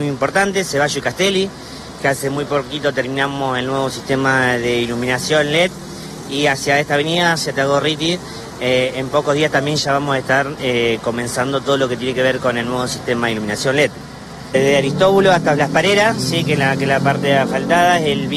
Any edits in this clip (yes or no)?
no